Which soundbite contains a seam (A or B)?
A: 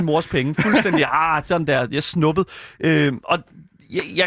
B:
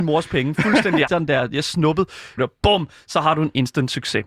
B